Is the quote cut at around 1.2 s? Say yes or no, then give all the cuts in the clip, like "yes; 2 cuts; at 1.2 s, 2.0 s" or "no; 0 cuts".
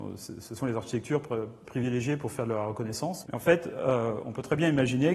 no; 1 cut; at 3.2 s